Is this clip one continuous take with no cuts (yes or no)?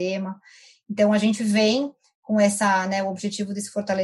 yes